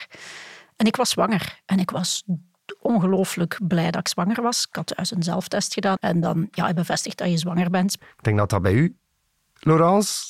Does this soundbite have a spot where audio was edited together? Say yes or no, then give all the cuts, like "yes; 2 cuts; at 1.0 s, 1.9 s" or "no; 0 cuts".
yes; 2 cuts; at 6.0 s, 8.0 s